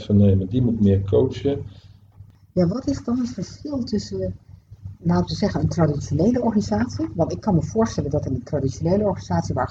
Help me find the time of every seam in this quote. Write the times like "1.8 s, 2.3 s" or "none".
2.7 s